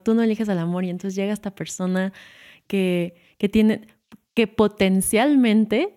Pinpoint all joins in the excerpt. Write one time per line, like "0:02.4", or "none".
none